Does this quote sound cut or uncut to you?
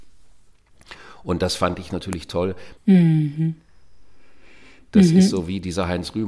cut